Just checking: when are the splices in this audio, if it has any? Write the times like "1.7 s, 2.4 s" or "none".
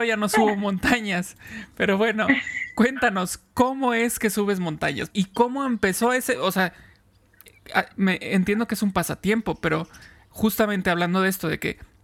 5.1 s